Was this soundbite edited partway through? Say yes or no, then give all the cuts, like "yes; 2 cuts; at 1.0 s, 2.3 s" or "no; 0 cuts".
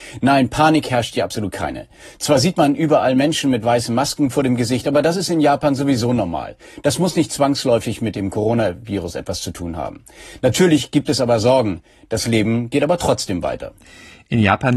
no; 0 cuts